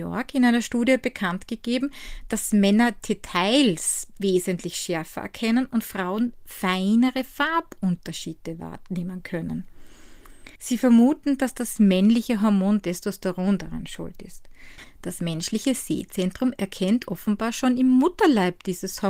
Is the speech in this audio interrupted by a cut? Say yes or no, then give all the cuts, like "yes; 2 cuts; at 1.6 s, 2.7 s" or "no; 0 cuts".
yes; 1 cut; at 10.5 s